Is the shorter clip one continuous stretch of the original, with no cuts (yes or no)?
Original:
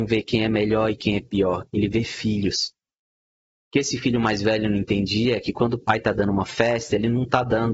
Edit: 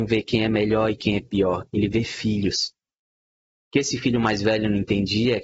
yes